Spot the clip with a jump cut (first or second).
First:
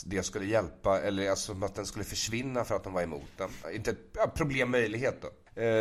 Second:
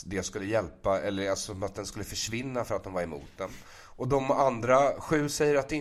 first